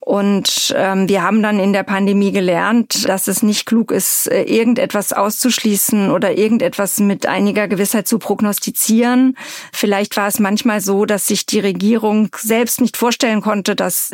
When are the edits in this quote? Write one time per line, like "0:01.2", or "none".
0:03.1